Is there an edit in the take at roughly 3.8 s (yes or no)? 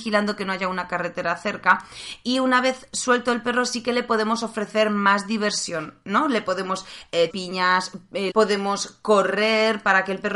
no